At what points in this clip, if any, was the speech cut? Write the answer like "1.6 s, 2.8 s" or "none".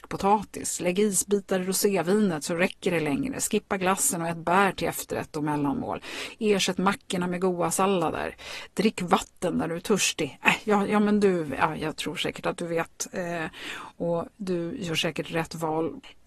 none